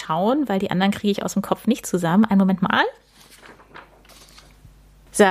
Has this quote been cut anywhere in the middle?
no; 0 cuts

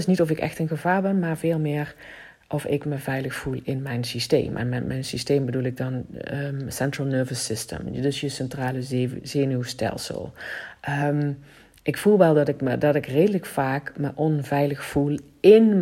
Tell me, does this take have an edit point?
no; 0 cuts

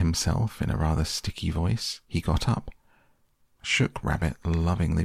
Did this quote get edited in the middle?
yes; 1 cut; at 2.0 s

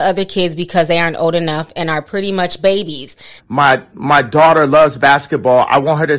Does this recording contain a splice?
yes; 1 cut; at 3.4 s

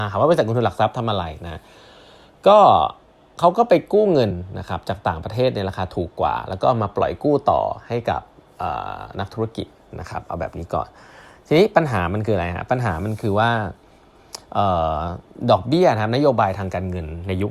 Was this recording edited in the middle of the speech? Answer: no; 0 cuts

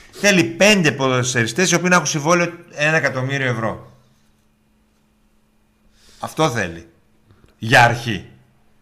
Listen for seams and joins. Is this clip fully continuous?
yes; 0 cuts

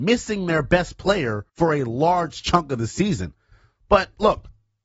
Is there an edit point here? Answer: yes; 1 cut; at 1.5 s

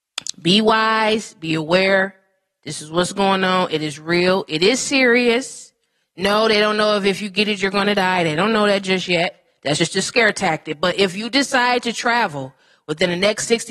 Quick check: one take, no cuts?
yes; 0 cuts

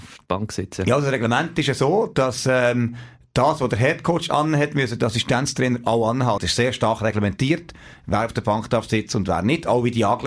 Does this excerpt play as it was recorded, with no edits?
no; 1 cut; at 6.4 s

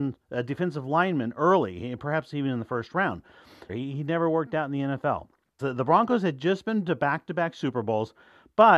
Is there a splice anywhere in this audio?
yes; 2 cuts; at 3.7 s, 5.6 s

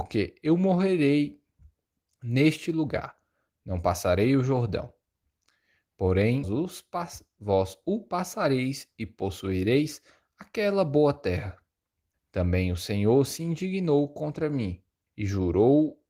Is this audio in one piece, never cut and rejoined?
no; 3 cuts; at 6.4 s, 12.1 s, 15.1 s

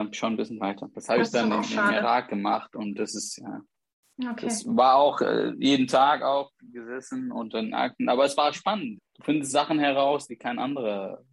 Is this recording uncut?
no; 3 cuts; at 0.9 s, 9.0 s, 10.3 s

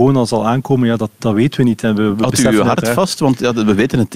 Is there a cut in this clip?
no; 0 cuts

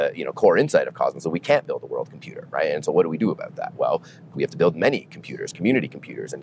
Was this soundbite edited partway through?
no; 0 cuts

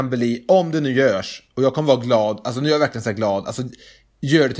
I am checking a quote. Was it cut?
no; 0 cuts

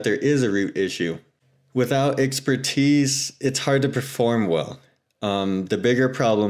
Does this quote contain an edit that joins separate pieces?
no; 0 cuts

